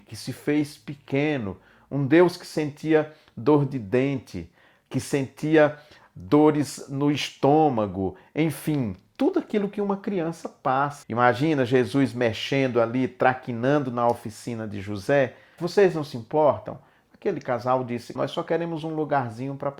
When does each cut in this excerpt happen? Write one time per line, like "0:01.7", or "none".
0:11.0
0:15.6
0:18.2